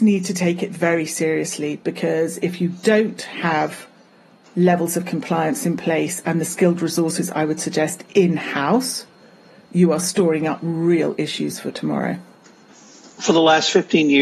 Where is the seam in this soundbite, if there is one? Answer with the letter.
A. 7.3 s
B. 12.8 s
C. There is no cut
C